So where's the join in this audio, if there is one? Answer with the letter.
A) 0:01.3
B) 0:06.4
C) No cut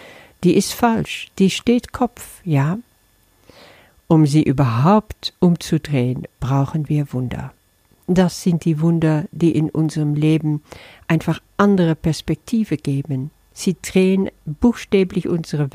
B